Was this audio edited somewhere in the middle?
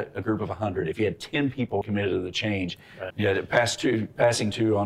yes; 2 cuts; at 1.8 s, 3.1 s

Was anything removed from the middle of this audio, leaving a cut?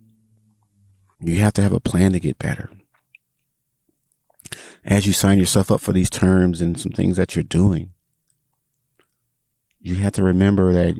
yes; 1 cut; at 1.1 s

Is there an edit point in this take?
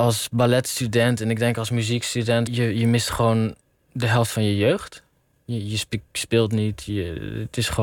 yes; 1 cut; at 2.5 s

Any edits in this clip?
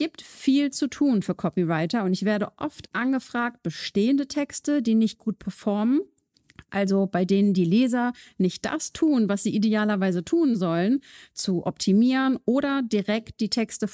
no; 0 cuts

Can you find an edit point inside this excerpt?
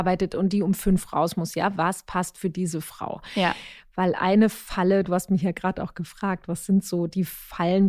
no; 0 cuts

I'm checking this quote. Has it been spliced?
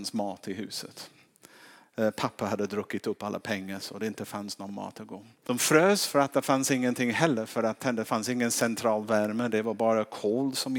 no; 0 cuts

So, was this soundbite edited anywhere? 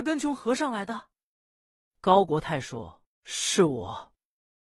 no; 0 cuts

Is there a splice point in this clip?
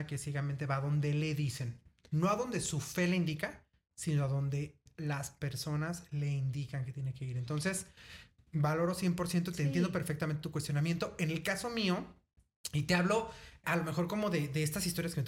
yes; 1 cut; at 13.6 s

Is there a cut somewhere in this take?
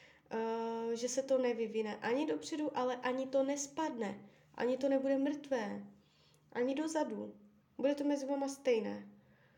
yes; 1 cut; at 7.6 s

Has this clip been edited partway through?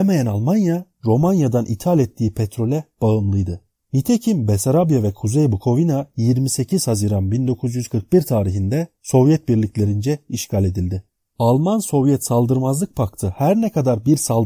yes; 1 cut; at 3.8 s

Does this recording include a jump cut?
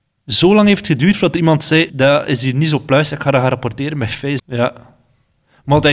yes; 2 cuts; at 1.9 s, 4.4 s

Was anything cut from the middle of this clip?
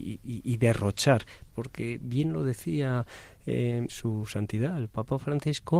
yes; 2 cuts; at 1.5 s, 3.9 s

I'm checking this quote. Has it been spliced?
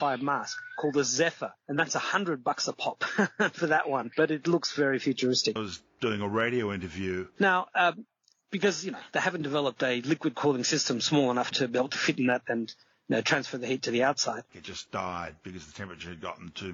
yes; 2 cuts; at 7.4 s, 14.5 s

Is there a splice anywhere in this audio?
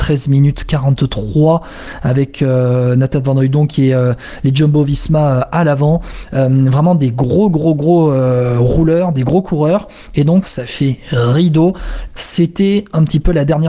yes; 3 cuts; at 6.2 s, 10.4 s, 12.1 s

